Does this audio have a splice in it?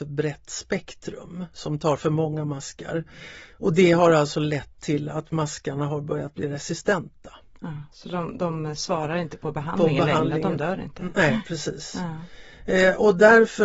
no; 0 cuts

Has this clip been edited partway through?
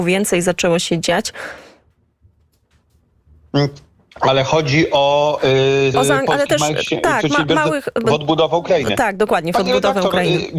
yes; 1 cut; at 5.9 s

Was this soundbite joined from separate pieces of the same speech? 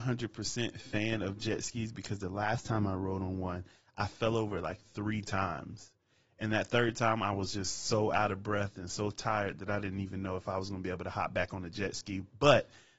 no; 0 cuts

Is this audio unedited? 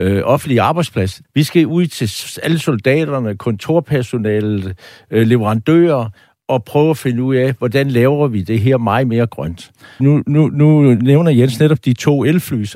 no; 2 cuts; at 1.2 s, 10.0 s

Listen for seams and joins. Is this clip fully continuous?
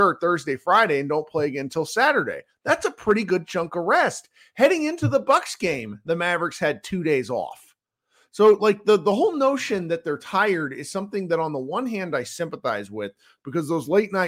yes; 0 cuts

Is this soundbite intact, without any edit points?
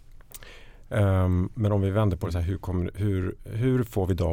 yes; 0 cuts

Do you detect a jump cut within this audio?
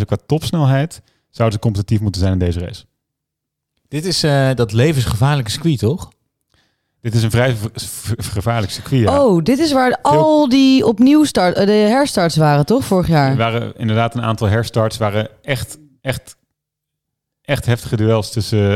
no; 0 cuts

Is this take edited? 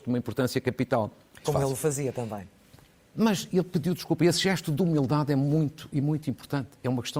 yes; 1 cut; at 1.4 s

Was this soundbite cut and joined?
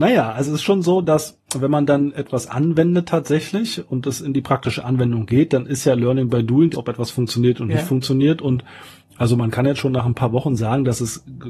yes; 1 cut; at 6.7 s

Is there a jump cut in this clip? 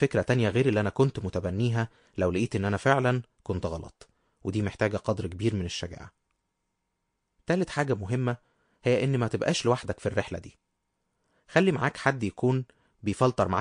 no; 0 cuts

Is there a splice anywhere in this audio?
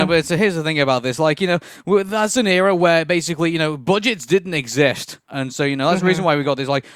yes; 1 cut; at 5.3 s

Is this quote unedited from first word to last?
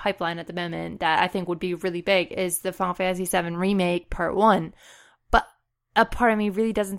yes; 0 cuts

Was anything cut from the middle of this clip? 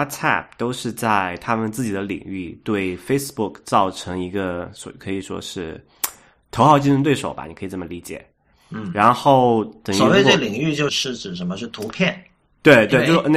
yes; 1 cut; at 10.9 s

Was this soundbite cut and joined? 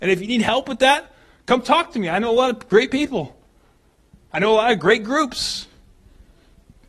no; 0 cuts

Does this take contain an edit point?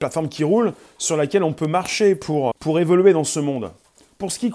yes; 1 cut; at 2.5 s

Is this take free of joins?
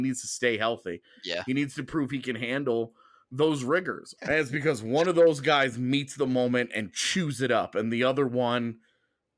no; 1 cut; at 4.2 s

